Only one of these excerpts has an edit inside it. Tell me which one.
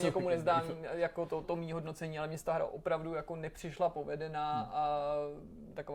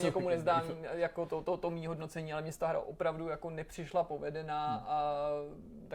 first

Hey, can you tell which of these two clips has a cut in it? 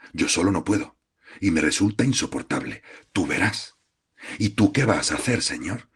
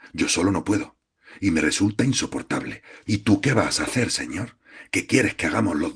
second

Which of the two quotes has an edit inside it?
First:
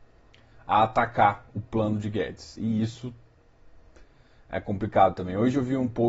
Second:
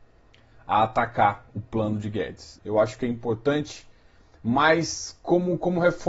second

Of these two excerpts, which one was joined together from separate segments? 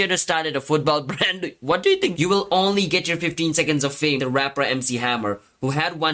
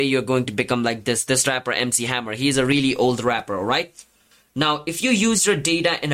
first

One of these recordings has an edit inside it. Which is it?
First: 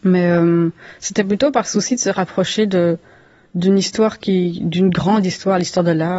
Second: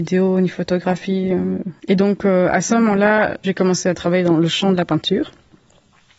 second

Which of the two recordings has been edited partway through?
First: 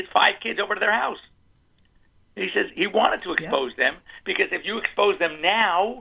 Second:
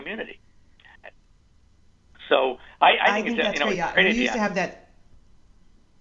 second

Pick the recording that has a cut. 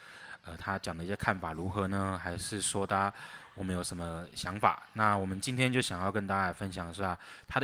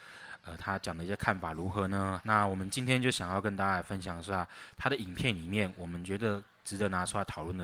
second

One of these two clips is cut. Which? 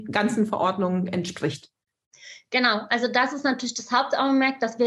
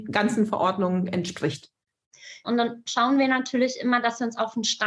second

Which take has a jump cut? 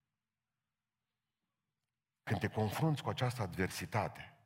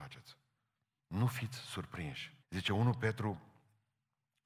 second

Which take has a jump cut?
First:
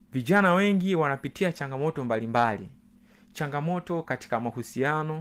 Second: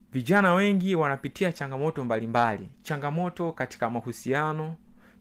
second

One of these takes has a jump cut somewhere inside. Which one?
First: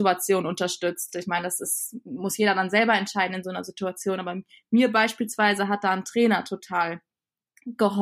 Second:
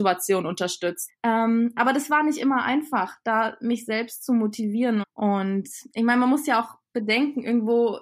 second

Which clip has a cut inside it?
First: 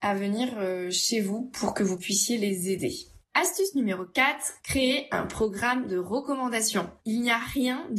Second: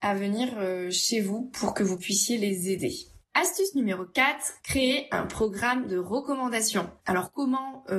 second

